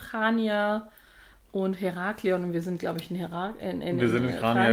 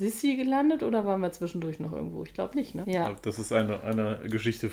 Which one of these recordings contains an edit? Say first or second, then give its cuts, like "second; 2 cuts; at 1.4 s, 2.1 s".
second; 1 cut; at 2.8 s